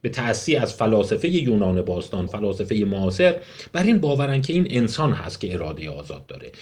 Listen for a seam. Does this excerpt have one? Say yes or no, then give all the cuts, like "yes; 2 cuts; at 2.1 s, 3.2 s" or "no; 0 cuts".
yes; 1 cut; at 2.3 s